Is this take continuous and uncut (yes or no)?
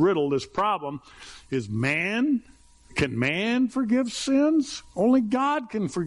no